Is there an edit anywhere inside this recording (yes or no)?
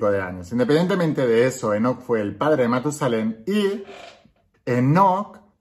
yes